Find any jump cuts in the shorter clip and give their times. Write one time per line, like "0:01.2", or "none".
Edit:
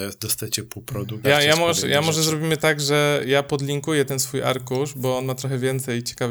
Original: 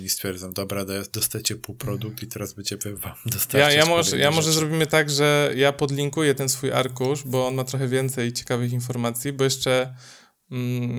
0:01.2